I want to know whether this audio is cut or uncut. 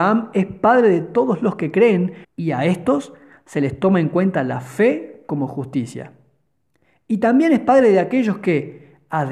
cut